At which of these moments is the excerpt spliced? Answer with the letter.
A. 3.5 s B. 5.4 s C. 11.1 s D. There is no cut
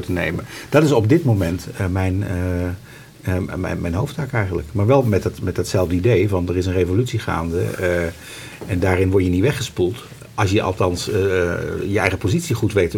D